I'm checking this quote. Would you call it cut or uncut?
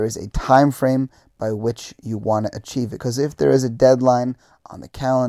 uncut